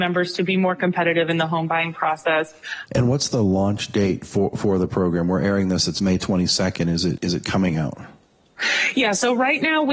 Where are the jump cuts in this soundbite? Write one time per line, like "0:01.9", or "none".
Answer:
0:02.9
0:07.2